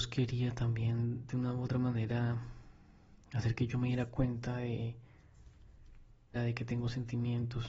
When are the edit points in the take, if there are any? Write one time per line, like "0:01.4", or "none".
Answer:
0:06.4